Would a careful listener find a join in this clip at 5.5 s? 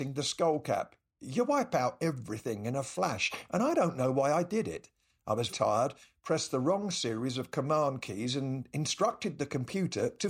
yes; 1 cut; at 5.5 s

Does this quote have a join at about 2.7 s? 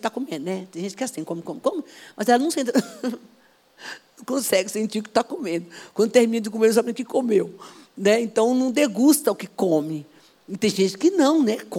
no; 0 cuts

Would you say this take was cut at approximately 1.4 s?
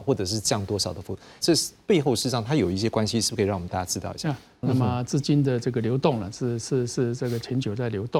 yes; 2 cuts; at 1.4 s, 4.6 s

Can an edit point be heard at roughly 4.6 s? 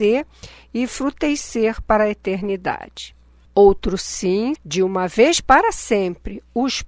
yes; 2 cuts; at 3.5 s, 4.6 s

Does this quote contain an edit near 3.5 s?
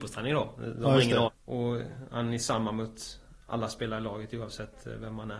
no; 1 cut; at 1.2 s

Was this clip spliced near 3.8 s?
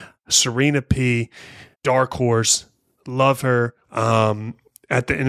yes; 2 cuts; at 1.7 s, 3.8 s

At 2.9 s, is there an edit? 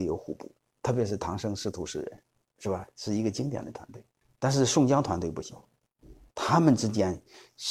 no; 1 cut; at 6.3 s

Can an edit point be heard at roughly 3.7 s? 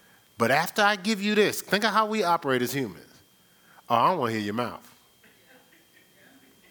no; 0 cuts

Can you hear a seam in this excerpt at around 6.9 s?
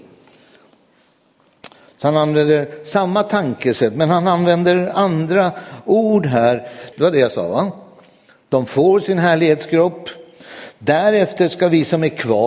yes; 2 cuts; at 1.9 s, 6.9 s

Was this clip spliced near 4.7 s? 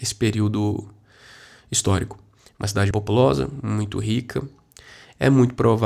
no; 1 cut; at 2.9 s

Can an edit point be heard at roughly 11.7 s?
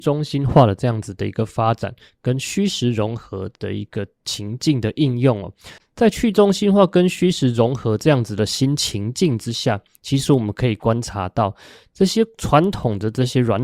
no; 1 cut; at 5.8 s

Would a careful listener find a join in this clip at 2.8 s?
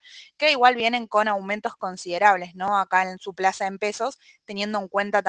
no; 0 cuts

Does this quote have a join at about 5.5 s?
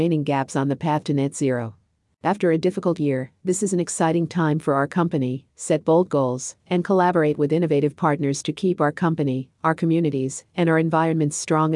yes; 1 cut; at 5.5 s

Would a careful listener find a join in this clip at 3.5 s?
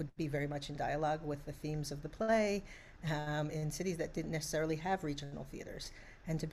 yes; 1 cut; at 3.5 s

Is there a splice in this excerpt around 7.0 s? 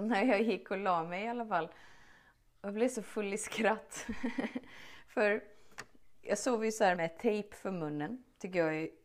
yes; 1 cut; at 7.0 s

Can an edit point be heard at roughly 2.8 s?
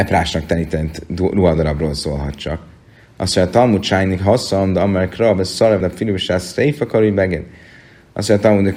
no; 1 cut; at 5.8 s

